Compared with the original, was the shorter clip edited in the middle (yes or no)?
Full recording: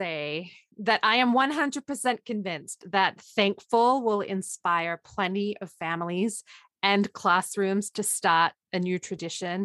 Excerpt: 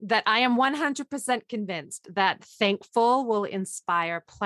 no